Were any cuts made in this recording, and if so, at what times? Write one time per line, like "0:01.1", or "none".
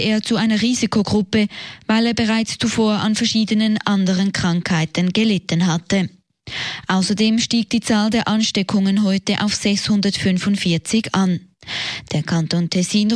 none